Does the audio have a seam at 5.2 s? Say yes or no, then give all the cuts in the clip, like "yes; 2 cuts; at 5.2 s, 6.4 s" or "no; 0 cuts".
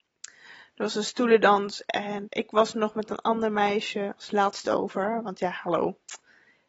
no; 1 cut; at 2.3 s